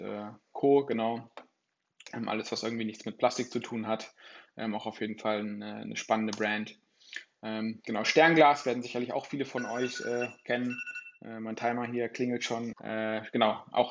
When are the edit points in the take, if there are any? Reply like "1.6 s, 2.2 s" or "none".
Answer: 12.7 s